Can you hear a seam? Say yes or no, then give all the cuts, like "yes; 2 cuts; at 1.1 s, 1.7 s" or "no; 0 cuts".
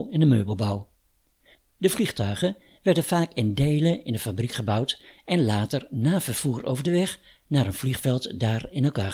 no; 0 cuts